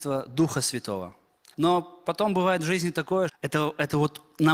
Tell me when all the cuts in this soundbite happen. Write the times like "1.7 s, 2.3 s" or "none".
1.5 s, 3.3 s